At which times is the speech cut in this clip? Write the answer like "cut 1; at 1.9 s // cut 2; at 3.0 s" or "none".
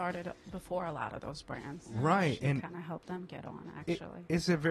none

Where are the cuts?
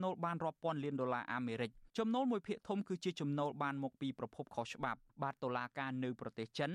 cut 1; at 1.9 s // cut 2; at 5.1 s

